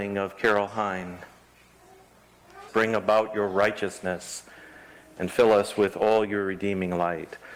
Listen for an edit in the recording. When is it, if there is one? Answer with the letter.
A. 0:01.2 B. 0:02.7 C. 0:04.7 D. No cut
B